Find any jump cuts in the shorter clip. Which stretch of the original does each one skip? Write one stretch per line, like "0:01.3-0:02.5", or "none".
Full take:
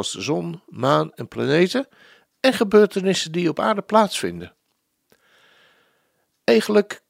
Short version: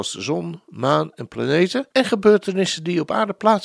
0:01.9-0:02.4